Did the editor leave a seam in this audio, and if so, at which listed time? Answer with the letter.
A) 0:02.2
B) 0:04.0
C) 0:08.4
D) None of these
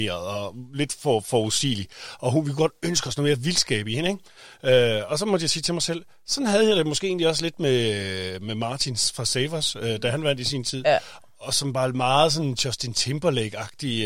D